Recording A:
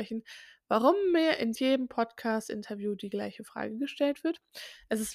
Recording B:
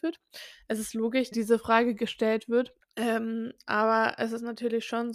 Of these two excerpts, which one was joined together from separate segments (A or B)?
B